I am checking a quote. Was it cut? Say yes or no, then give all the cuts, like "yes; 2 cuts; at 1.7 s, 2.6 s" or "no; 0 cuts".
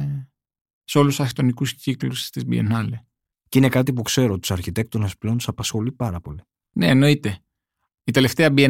yes; 1 cut; at 3.3 s